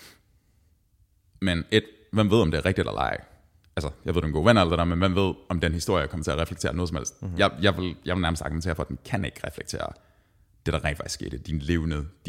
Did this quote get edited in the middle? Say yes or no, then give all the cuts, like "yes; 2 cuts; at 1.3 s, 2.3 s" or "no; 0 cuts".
no; 0 cuts